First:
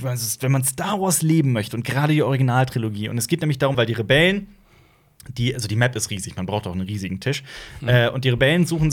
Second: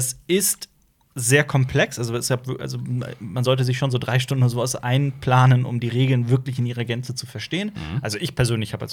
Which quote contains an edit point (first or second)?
first